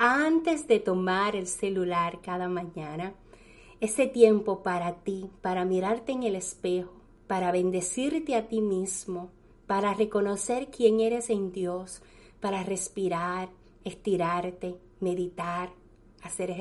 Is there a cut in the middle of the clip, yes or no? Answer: no